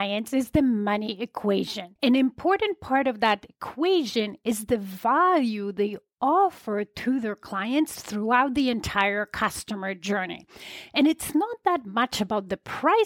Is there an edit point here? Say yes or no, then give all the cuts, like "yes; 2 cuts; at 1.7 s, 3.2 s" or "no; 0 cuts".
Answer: yes; 1 cut; at 2.0 s